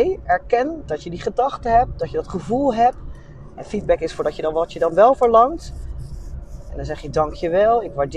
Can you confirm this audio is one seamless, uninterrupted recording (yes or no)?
no